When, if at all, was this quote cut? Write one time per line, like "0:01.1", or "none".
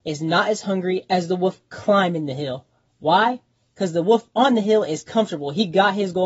none